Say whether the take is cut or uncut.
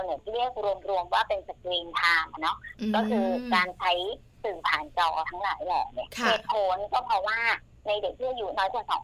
uncut